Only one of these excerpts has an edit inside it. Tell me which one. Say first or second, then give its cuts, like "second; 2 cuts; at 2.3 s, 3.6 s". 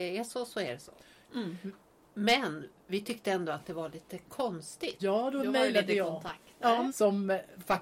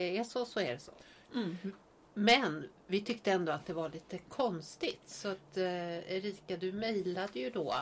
first; 2 cuts; at 5.0 s, 6.9 s